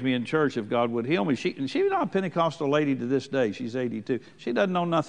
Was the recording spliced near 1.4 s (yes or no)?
no